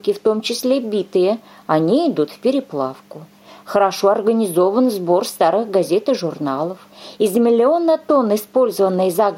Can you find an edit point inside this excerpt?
no; 0 cuts

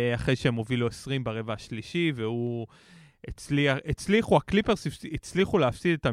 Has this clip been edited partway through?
no; 0 cuts

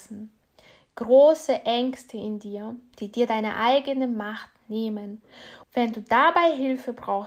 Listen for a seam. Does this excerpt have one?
yes; 2 cuts; at 2.9 s, 5.6 s

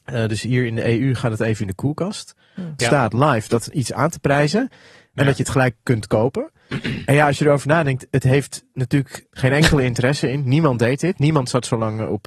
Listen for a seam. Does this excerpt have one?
yes; 2 cuts; at 2.8 s, 9.3 s

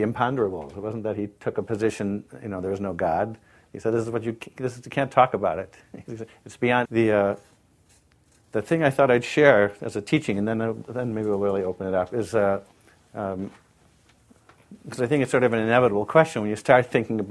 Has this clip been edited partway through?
yes; 2 cuts; at 6.9 s, 14.8 s

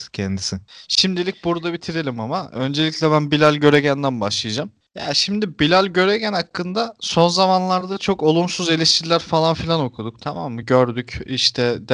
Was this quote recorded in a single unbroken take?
yes; 0 cuts

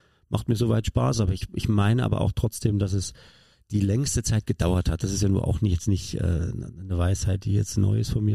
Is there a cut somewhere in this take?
no; 0 cuts

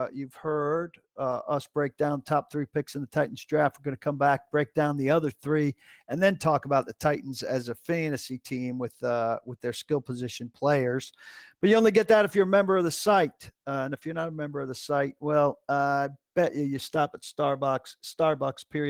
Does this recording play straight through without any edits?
yes; 0 cuts

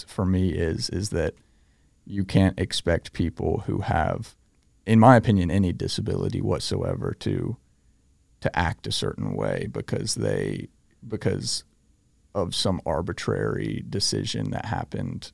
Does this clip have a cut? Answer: no; 0 cuts

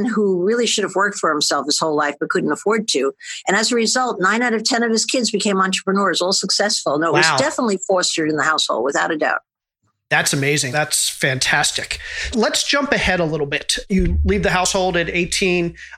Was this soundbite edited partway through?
yes; 2 cuts; at 10.7 s, 12.3 s

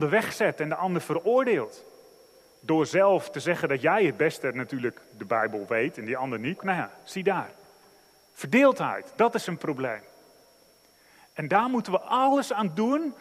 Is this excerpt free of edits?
no; 1 cut; at 6.6 s

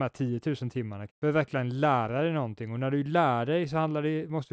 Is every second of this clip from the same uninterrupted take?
no; 1 cut; at 1.1 s

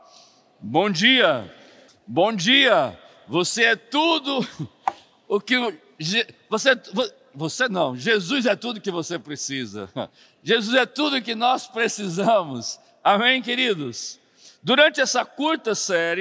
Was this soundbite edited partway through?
yes; 1 cut; at 1.9 s

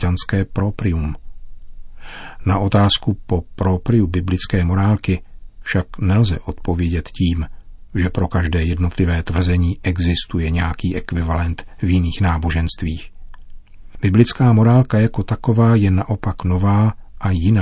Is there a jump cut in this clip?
no; 0 cuts

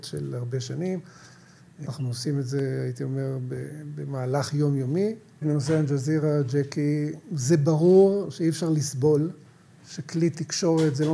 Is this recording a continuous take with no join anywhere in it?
no; 3 cuts; at 1.9 s, 5.4 s, 7.2 s

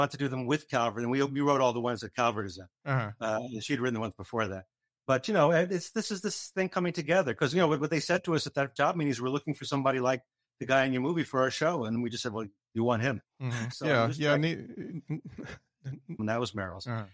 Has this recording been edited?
yes; 2 cuts; at 13.7 s, 16.2 s

